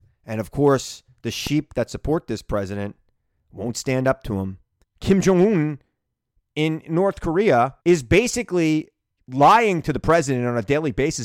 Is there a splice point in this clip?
yes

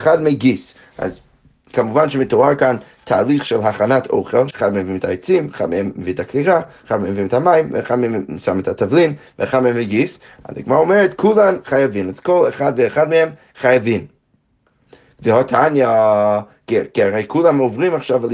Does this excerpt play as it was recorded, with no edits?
no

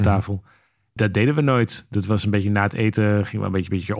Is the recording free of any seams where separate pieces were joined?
no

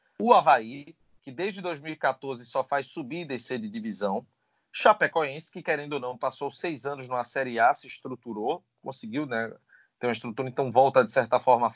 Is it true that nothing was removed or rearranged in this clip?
yes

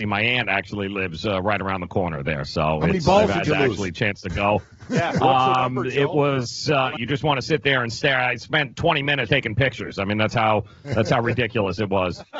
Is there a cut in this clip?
yes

